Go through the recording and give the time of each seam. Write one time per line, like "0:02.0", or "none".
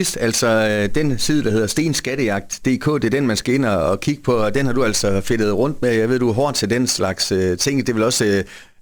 none